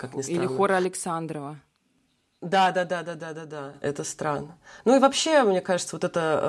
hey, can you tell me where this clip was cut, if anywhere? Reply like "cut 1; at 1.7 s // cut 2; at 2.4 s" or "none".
none